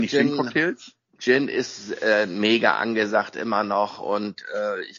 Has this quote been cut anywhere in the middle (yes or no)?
no